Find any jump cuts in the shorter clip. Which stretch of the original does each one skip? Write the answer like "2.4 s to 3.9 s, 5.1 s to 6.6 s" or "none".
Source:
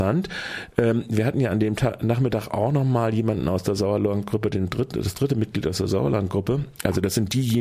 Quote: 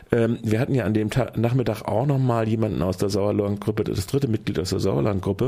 4.5 s to 4.9 s

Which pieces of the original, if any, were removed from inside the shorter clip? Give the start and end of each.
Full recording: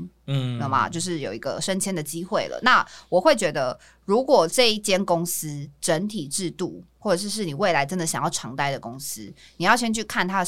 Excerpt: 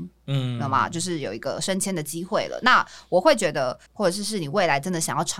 3.9 s to 6.9 s

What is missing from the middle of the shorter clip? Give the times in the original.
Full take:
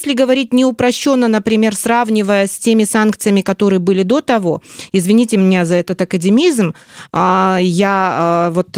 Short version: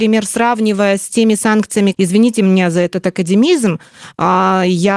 3.4 s to 4.9 s

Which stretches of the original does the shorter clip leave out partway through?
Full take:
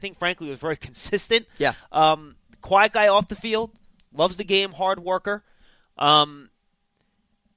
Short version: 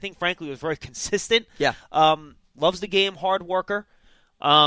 2.4 s to 4.0 s

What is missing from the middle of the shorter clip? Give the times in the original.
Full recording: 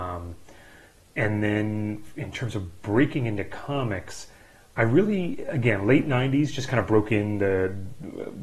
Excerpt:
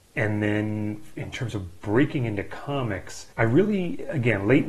4.3 s to 4.7 s

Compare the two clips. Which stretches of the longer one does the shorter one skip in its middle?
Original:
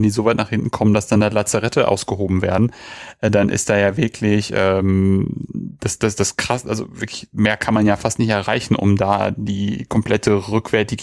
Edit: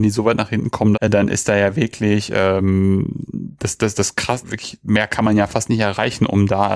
0.9 s to 3.1 s, 6.6 s to 6.9 s

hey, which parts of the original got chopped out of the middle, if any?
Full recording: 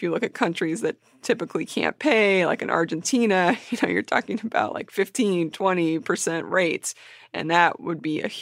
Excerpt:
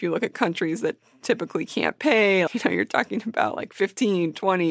2.5 s to 3.6 s

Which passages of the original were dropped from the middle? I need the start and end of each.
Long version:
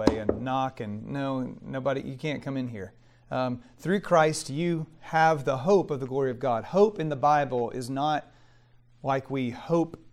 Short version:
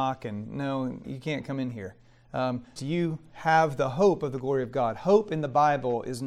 1.6 s to 2.0 s, 3.7 s to 4.4 s

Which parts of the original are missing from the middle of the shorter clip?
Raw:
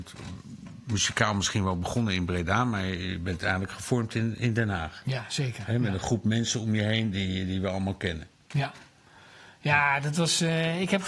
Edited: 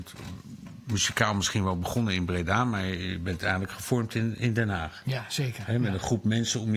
none

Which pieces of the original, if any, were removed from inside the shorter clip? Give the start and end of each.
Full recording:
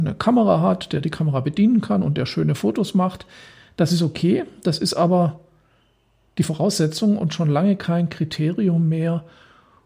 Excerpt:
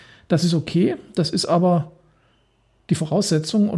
none

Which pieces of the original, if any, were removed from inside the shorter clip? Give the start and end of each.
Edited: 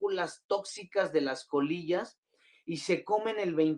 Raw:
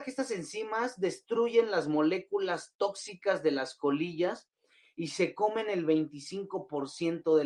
none

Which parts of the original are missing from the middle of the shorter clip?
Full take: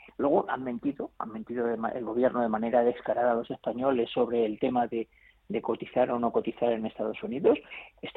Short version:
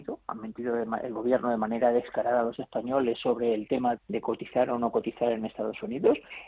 4.9 s to 5.4 s

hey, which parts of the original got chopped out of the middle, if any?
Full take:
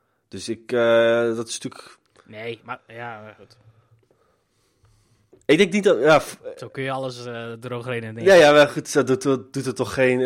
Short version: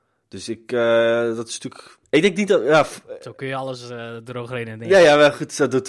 2.0 s to 5.4 s

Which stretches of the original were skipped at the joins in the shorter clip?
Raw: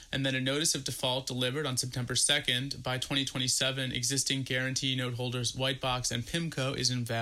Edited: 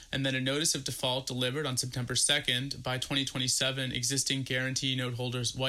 none

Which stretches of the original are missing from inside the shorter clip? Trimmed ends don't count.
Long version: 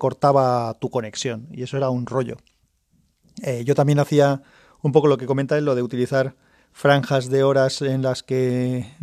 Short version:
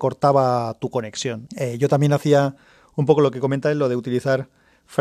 1.5 s to 3.3 s

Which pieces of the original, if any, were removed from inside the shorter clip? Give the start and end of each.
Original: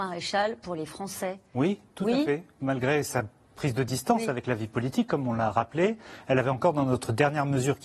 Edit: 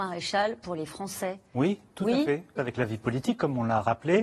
2.6 s to 4.3 s

